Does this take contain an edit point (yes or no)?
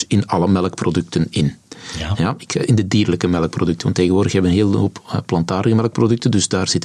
no